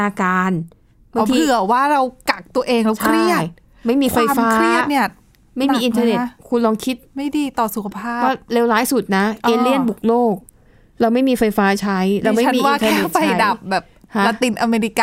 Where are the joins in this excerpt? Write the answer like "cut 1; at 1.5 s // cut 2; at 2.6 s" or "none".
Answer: none